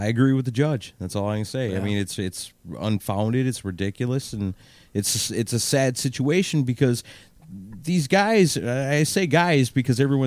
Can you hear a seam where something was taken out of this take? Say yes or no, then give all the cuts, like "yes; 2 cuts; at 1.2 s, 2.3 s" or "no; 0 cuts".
no; 0 cuts